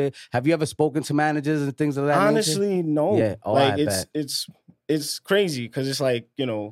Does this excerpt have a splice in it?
no; 0 cuts

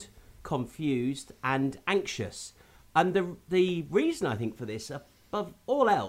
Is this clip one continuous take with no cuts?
yes; 0 cuts

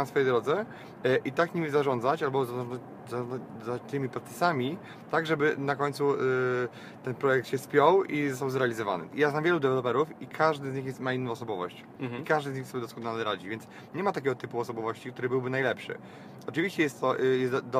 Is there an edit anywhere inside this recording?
no; 0 cuts

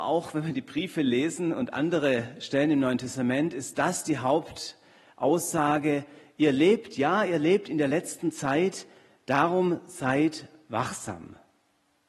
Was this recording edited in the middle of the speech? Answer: no; 0 cuts

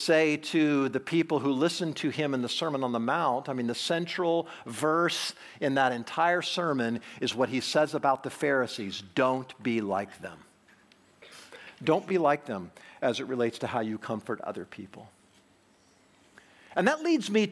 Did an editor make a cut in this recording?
no; 0 cuts

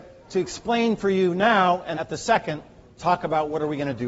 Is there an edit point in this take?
yes; 1 cut; at 1.9 s

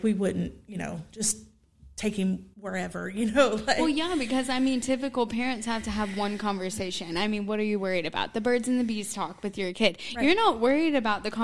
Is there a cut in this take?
no; 0 cuts

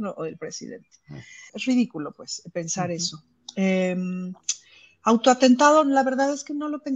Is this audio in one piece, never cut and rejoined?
no; 1 cut; at 1.5 s

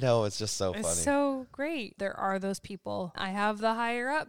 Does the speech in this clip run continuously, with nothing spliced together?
no; 2 cuts; at 2.0 s, 3.1 s

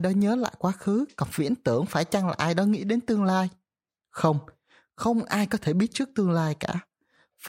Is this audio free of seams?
yes; 0 cuts

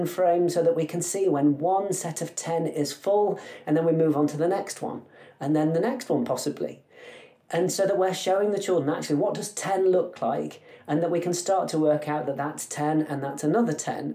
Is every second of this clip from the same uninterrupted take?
yes; 0 cuts

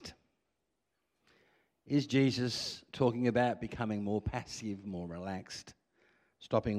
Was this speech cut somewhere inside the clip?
no; 0 cuts

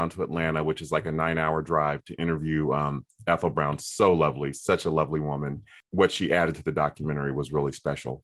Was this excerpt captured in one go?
yes; 0 cuts

